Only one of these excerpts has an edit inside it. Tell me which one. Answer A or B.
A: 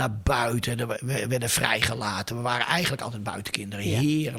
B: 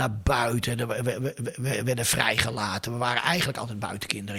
A